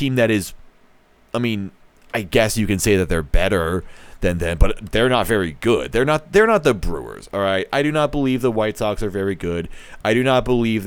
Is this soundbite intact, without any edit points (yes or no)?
yes